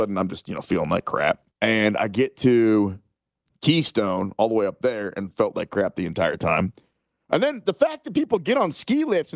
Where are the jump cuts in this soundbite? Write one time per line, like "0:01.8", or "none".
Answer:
0:01.5